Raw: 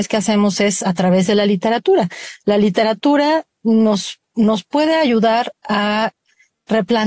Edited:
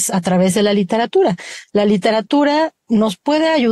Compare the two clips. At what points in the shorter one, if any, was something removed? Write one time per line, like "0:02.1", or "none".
0:02.8